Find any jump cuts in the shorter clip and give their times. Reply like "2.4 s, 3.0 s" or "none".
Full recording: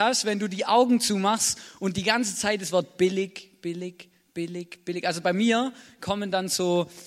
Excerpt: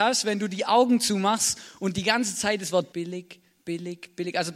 2.9 s